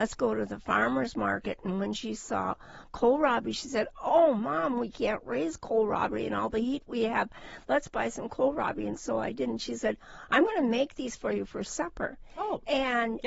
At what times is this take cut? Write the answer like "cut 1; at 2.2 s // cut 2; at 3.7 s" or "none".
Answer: none

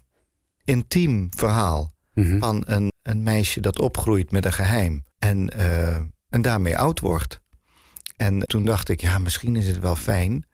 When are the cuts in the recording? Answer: cut 1; at 2.9 s // cut 2; at 5.1 s // cut 3; at 8.5 s

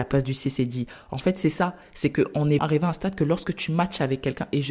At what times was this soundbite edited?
cut 1; at 2.6 s

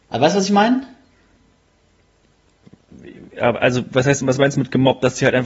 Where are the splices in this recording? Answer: none

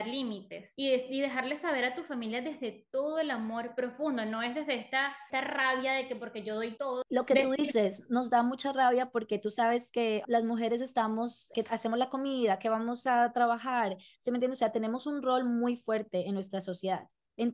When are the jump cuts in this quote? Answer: none

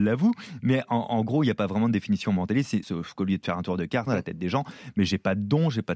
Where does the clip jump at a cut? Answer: cut 1; at 2.8 s // cut 2; at 4.1 s

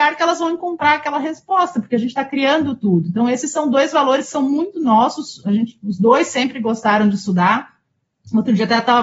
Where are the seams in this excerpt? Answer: none

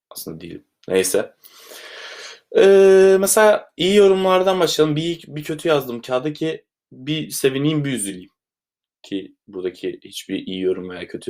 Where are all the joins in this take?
none

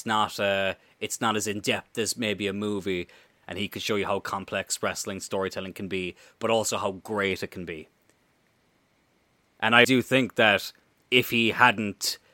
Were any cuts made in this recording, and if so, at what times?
cut 1; at 3.3 s // cut 2; at 9.8 s

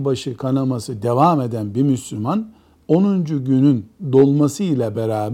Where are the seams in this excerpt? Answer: none

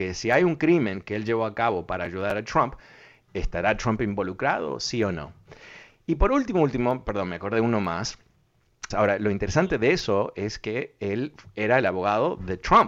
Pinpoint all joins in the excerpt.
cut 1; at 8.9 s

